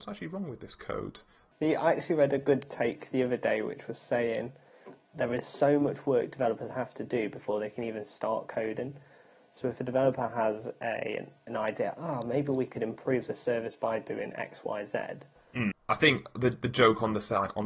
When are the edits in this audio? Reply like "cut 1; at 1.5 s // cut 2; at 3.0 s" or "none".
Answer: cut 1; at 1.5 s // cut 2; at 15.7 s